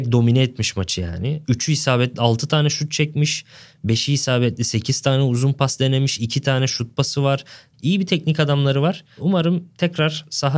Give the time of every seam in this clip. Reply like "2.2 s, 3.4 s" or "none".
7.7 s